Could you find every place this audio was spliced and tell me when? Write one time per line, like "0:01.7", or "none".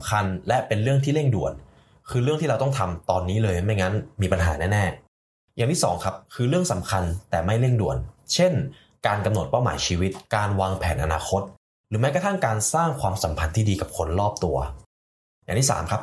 none